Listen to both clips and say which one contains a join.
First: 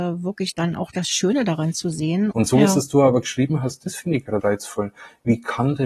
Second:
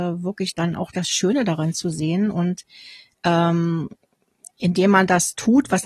first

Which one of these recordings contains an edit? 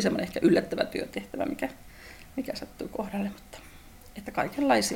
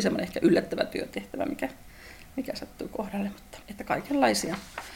second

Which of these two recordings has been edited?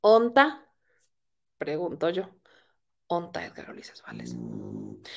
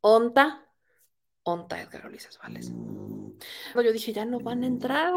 second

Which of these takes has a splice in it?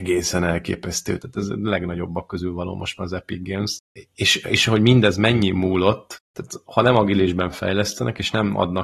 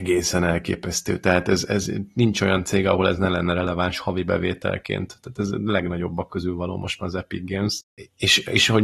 first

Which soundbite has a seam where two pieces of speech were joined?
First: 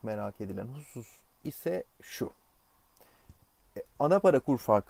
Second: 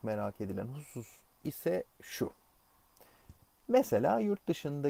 first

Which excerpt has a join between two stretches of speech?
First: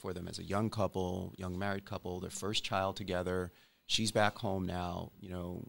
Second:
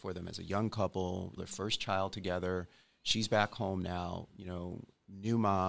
second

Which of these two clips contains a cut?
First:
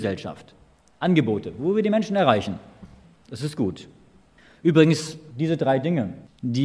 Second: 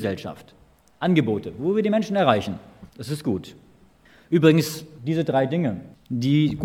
second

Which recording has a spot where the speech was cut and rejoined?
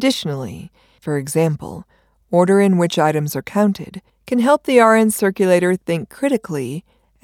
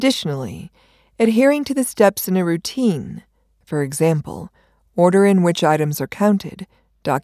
first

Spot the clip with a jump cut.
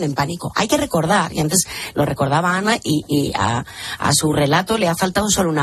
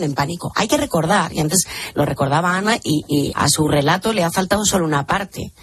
second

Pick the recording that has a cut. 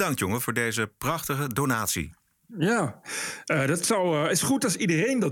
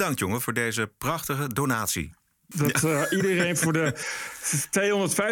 second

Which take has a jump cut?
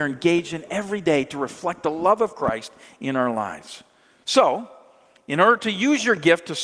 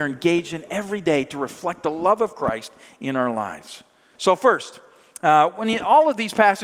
second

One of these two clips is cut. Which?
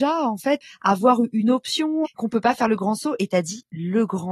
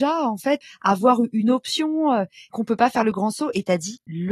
first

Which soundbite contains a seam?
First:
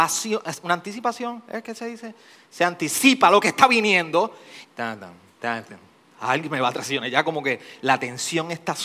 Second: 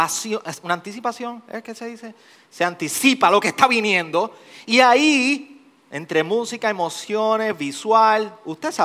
first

